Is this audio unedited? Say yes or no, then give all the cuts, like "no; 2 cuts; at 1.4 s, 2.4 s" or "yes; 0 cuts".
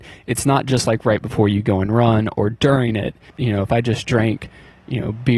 no; 1 cut; at 3.3 s